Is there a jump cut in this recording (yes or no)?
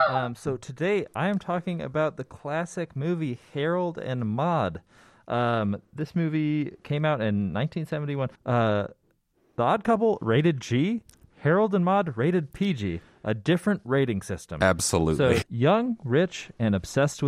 yes